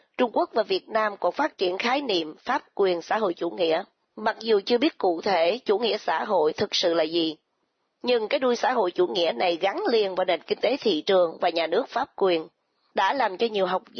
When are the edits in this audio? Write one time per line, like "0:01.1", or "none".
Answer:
none